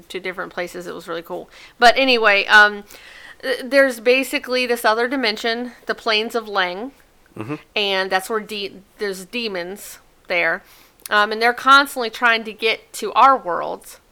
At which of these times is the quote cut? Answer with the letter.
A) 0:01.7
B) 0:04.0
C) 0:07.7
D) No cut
D